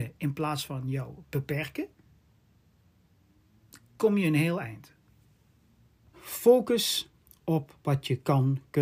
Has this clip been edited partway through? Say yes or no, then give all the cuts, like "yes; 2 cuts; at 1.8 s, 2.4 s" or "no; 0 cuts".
yes; 1 cut; at 6.1 s